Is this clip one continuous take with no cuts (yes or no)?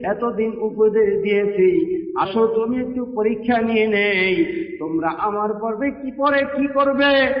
no